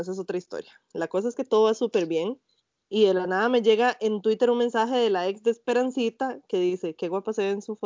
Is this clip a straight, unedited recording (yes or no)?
yes